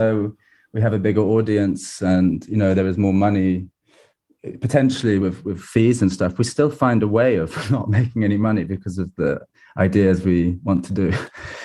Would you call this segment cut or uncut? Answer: uncut